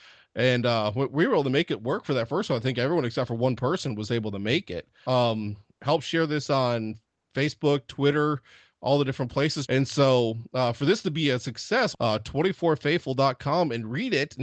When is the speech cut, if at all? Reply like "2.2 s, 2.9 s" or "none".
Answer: 5.1 s, 9.7 s, 11.9 s